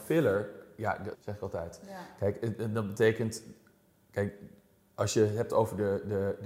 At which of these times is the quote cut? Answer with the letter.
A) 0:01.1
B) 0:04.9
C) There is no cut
A